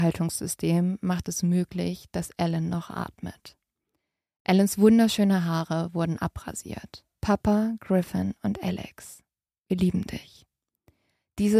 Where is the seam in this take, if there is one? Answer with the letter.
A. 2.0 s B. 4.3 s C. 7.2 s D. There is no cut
C